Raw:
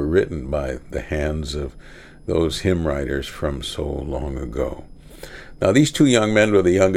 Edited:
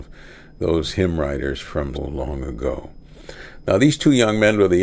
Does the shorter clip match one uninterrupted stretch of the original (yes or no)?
no